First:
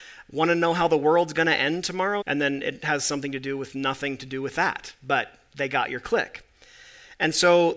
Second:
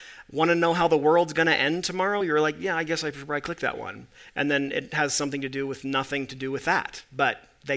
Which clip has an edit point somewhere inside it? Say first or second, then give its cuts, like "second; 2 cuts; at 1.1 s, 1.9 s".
first; 1 cut; at 2.2 s